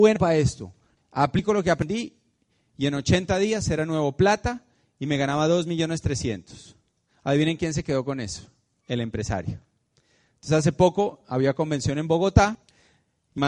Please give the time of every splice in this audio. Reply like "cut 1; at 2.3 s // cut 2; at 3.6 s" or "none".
cut 1; at 8.8 s